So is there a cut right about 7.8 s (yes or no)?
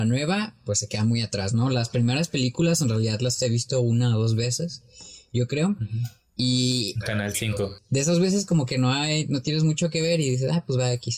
yes